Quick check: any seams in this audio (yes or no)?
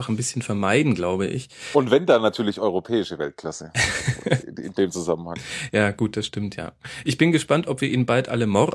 no